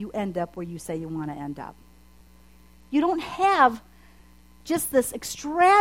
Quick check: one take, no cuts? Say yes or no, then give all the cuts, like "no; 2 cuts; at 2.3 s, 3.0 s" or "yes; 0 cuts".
yes; 0 cuts